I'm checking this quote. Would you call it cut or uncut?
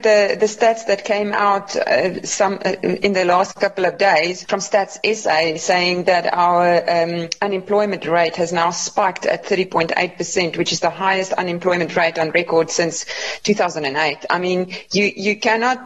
uncut